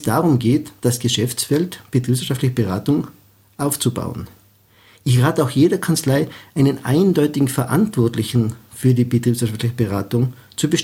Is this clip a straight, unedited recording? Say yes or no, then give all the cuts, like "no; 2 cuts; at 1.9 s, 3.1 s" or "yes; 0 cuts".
yes; 0 cuts